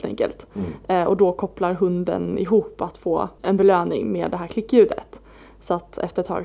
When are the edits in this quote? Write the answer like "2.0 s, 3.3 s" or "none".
3.4 s

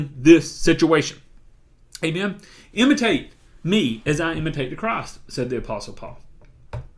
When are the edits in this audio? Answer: none

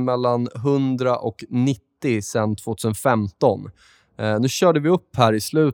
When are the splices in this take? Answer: none

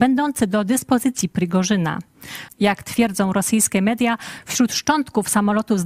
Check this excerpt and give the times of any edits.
2.5 s

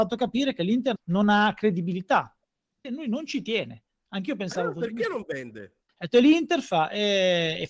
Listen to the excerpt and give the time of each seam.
1.0 s, 2.8 s, 5.9 s

